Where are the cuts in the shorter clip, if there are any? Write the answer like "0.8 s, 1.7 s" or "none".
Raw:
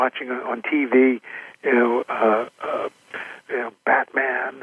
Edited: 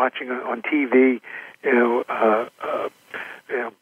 none